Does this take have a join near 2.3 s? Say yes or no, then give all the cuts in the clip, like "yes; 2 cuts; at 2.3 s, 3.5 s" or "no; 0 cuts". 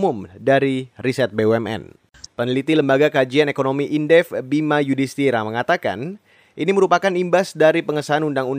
yes; 1 cut; at 2.3 s